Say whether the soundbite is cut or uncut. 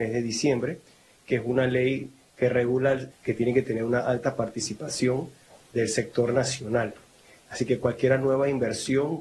cut